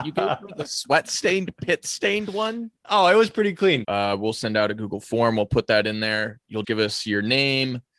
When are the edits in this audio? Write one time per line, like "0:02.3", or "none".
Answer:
0:03.8
0:06.6